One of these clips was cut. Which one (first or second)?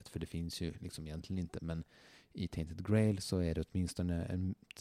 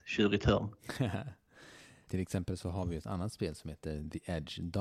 second